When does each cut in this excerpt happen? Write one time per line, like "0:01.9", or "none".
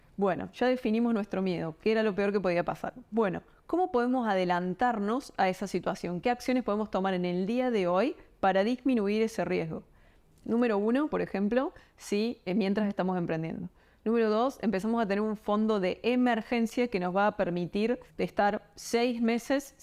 0:11.1
0:18.1